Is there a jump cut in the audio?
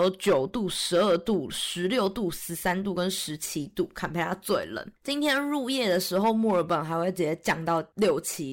no; 0 cuts

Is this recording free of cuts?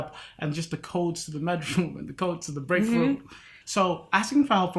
no; 1 cut; at 3.6 s

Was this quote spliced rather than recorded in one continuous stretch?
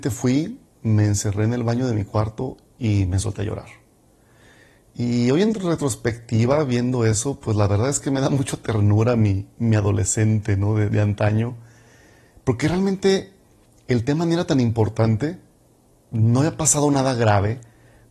no; 0 cuts

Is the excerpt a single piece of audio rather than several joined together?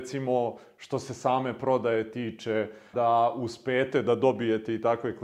no; 1 cut; at 2.9 s

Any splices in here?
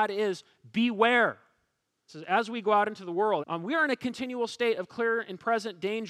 yes; 2 cuts; at 2.1 s, 3.4 s

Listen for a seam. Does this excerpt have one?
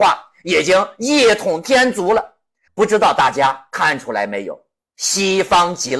yes; 1 cut; at 2.7 s

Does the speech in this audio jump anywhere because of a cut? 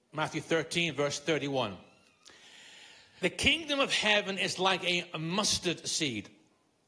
yes; 1 cut; at 3.2 s

